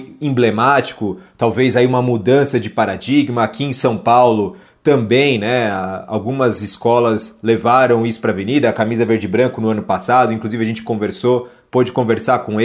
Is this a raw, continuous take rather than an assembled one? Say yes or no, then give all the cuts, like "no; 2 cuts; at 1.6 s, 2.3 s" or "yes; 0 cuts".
yes; 0 cuts